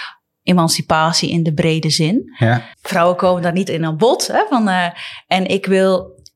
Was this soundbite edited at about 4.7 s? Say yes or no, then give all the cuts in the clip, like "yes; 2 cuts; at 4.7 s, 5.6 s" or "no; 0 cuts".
no; 1 cut; at 2.7 s